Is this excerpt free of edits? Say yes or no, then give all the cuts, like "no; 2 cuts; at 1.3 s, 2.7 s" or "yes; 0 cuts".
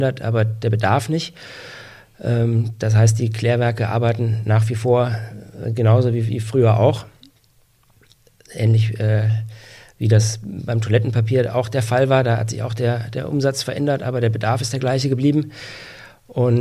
yes; 0 cuts